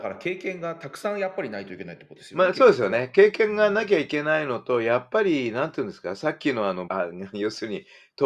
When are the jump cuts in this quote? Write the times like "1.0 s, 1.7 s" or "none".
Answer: 6.9 s